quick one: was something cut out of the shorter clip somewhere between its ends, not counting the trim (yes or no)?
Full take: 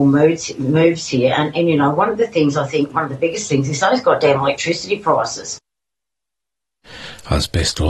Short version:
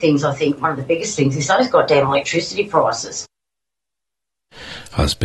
no